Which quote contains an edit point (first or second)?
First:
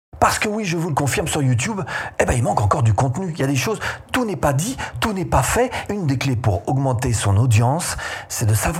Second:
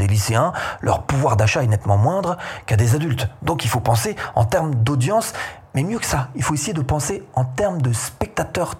first